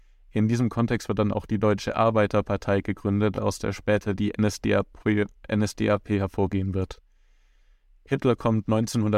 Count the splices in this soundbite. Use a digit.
0